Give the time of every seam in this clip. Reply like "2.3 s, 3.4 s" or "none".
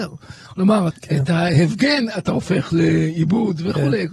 0.9 s